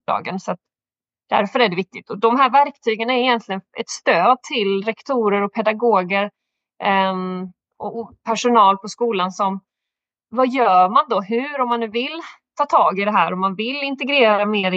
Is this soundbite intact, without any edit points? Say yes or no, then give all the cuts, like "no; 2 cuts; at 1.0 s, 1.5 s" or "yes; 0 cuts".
yes; 0 cuts